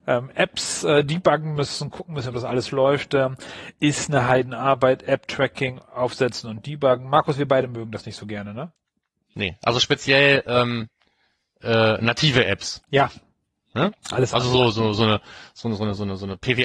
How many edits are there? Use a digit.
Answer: 0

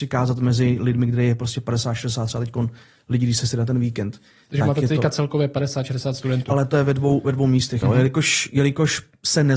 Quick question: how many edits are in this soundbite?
2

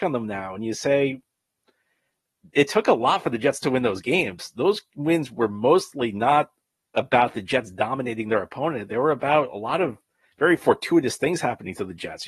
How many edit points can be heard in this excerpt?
0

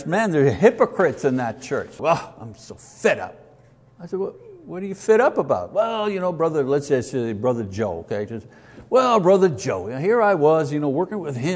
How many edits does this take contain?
1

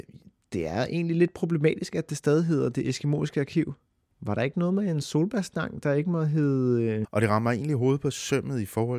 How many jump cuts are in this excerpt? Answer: 2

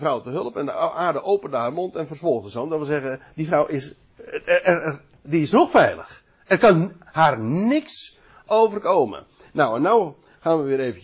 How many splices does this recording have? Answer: 0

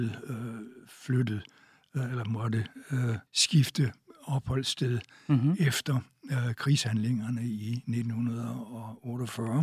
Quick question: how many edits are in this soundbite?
1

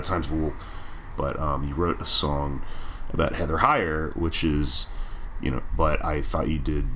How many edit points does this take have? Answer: 2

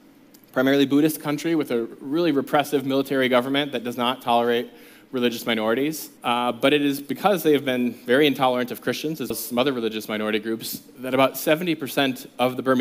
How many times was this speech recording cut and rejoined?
2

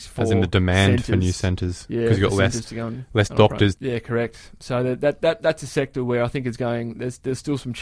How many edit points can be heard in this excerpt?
1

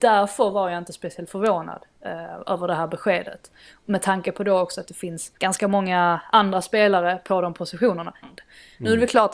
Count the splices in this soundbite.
2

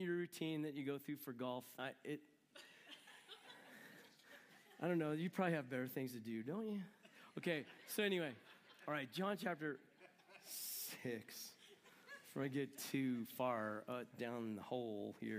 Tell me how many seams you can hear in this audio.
1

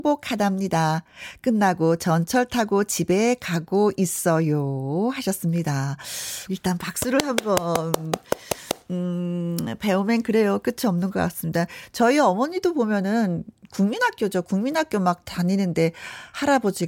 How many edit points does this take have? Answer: 1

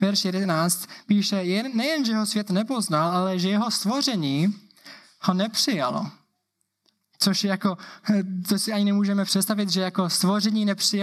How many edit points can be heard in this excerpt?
0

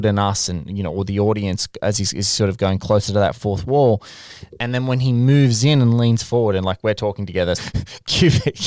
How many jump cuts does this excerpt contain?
2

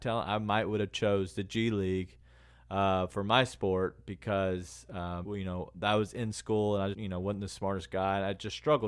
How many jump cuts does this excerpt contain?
2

